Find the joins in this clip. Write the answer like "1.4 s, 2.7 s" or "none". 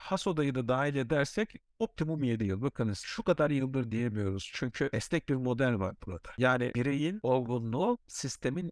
none